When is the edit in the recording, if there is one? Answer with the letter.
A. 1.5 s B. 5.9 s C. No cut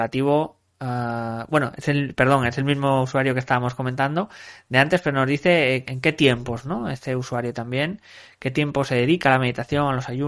B